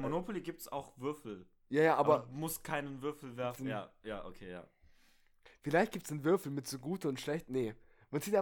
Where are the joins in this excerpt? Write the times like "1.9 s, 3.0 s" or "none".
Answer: 3.5 s